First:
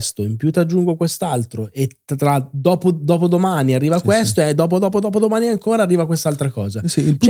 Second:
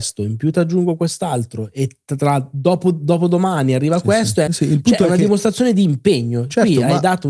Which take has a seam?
second; 1 cut; at 4.5 s

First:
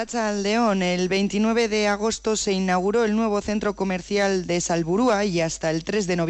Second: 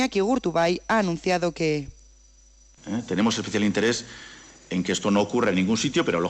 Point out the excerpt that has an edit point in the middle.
second; 1 cut; at 2.8 s

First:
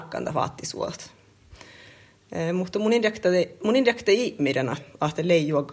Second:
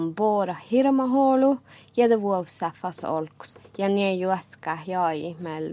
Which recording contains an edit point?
first; 1 cut; at 4.7 s

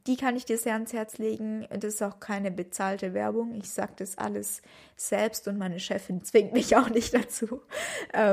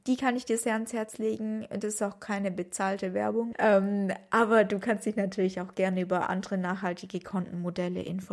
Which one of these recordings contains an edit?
second; 1 cut; at 3.5 s

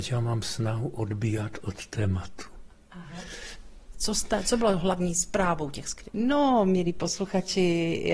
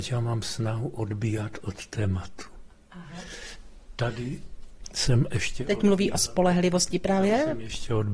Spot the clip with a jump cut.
first; 2 cuts; at 3.9 s, 6.1 s

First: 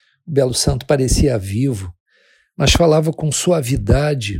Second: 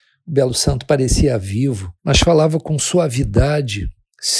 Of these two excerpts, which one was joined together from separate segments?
second; 1 cut; at 2.0 s

